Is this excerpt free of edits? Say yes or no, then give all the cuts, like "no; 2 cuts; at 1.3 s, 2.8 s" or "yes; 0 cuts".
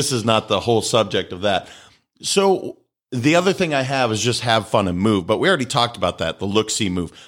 yes; 0 cuts